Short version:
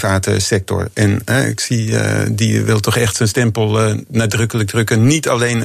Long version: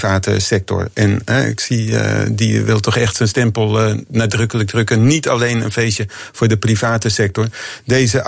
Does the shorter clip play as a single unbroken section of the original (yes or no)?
yes